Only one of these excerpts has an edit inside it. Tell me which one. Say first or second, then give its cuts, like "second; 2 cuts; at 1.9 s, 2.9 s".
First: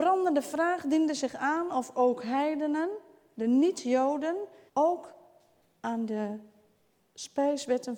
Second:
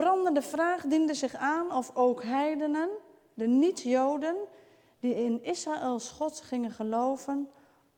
first; 1 cut; at 4.7 s